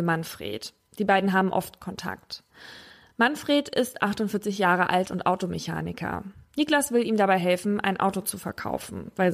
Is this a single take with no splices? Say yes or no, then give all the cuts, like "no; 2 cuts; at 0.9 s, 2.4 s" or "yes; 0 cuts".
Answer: yes; 0 cuts